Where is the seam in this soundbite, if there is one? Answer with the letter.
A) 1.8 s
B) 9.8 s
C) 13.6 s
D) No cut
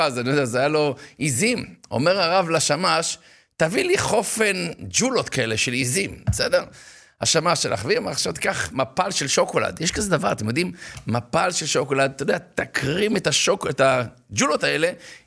D